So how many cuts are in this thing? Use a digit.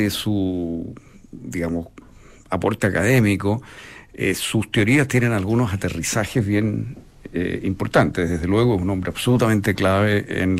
0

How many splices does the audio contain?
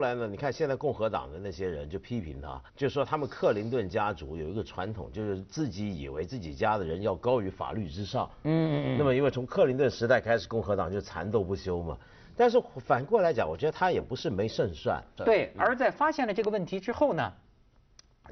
2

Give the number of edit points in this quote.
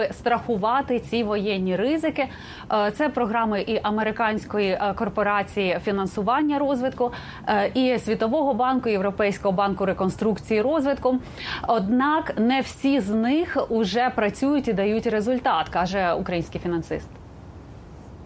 0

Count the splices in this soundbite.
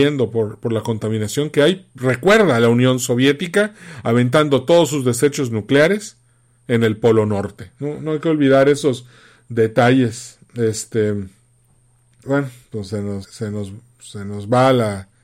2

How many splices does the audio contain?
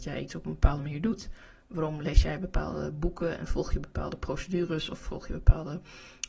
1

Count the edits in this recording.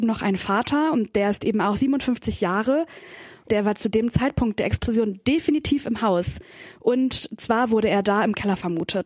1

